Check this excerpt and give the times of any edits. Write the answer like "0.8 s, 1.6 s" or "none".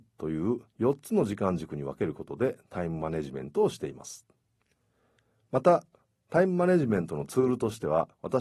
none